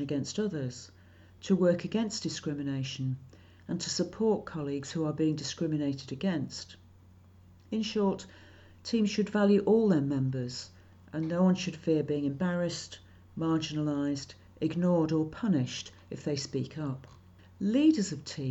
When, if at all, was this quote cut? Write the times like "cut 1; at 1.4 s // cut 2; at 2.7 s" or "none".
none